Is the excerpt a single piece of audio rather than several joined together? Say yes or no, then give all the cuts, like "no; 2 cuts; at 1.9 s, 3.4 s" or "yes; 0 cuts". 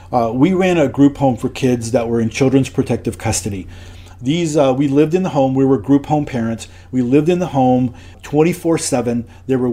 no; 1 cut; at 8.1 s